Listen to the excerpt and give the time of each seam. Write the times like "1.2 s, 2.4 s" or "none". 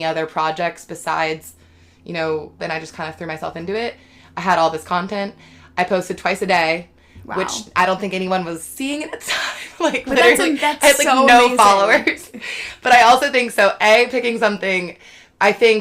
2.6 s